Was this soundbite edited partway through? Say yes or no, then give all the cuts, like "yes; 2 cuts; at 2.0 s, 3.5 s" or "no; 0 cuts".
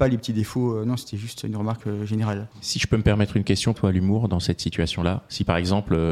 yes; 2 cuts; at 2.5 s, 3.7 s